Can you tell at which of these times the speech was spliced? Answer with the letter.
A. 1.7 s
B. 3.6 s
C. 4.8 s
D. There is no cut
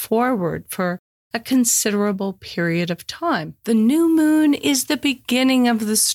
B